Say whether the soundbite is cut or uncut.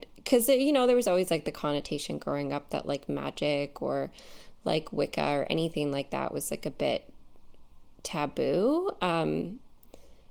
uncut